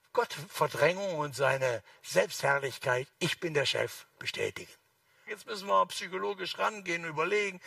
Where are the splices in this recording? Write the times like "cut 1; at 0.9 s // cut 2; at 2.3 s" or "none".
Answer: cut 1; at 3.1 s // cut 2; at 5.3 s